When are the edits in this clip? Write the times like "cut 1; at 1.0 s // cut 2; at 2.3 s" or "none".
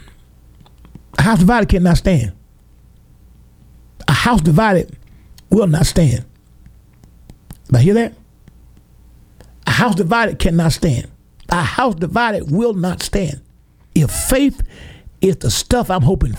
cut 1; at 13.9 s